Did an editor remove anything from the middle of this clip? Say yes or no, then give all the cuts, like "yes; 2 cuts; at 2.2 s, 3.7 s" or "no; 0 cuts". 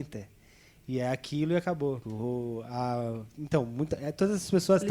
yes; 1 cut; at 2.0 s